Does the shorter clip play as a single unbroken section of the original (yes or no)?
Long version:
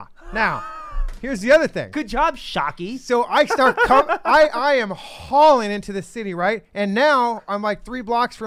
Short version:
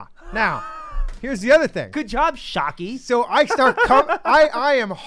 yes